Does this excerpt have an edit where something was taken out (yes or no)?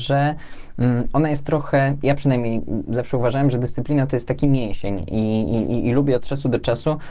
no